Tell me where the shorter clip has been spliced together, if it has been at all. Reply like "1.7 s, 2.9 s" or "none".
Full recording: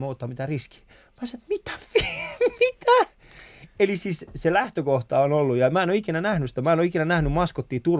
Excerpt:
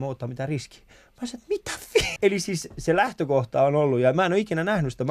2.2 s